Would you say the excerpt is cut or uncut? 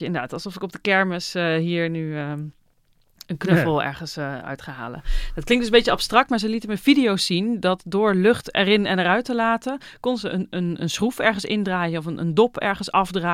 uncut